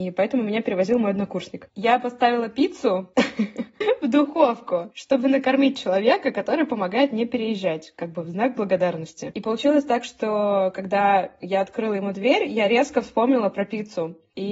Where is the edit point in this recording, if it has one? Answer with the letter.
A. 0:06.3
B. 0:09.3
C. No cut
B